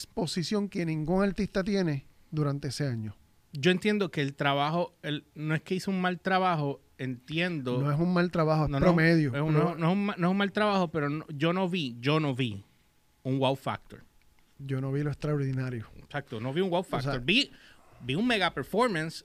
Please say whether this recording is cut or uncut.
uncut